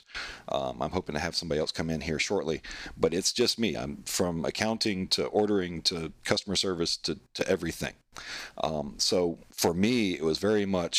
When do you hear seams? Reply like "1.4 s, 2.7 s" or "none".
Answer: none